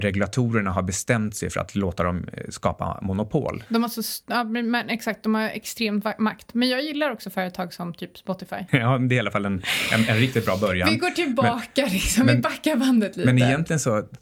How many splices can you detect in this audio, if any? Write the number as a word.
one